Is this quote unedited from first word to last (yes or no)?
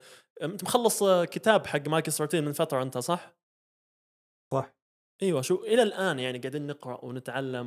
yes